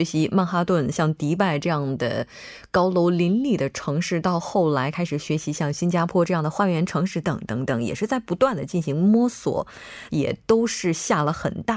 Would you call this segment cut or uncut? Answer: cut